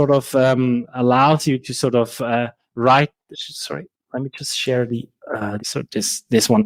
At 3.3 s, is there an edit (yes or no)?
yes